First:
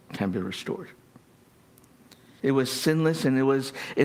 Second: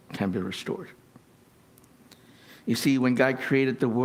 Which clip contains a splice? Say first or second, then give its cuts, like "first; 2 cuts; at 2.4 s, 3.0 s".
first; 1 cut; at 2.4 s